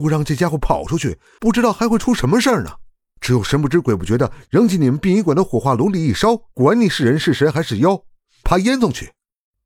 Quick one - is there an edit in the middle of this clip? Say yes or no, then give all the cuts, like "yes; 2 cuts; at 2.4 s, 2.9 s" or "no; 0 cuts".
yes; 2 cuts; at 6.5 s, 8.4 s